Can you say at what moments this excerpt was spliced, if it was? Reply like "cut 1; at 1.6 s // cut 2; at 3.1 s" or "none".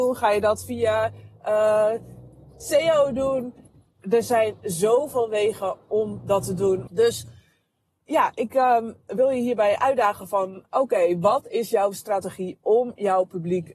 cut 1; at 6.9 s